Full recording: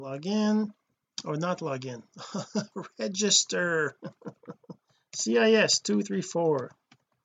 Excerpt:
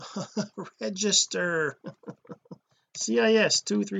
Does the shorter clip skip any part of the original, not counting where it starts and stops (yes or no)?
no